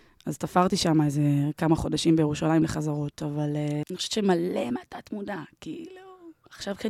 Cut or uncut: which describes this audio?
cut